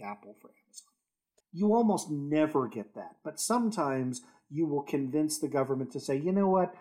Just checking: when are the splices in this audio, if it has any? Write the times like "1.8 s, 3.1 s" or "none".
1.4 s